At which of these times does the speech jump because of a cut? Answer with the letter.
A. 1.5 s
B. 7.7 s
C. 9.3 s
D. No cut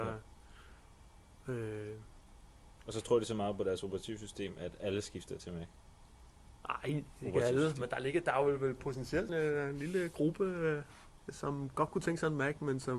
C